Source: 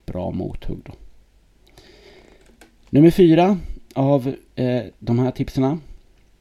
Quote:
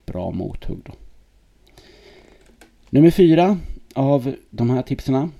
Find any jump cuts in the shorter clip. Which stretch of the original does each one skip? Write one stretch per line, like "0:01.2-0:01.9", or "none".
0:04.5-0:05.0